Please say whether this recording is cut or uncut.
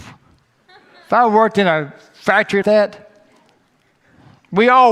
cut